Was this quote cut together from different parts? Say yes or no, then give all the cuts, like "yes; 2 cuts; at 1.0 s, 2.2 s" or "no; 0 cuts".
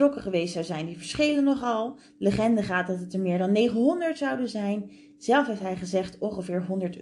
no; 0 cuts